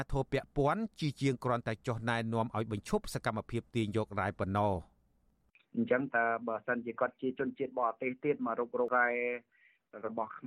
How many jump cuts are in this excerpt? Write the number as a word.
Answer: zero